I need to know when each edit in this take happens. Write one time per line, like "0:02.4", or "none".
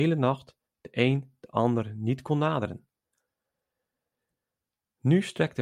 none